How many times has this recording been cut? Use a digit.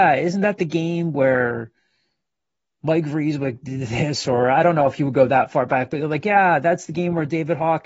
0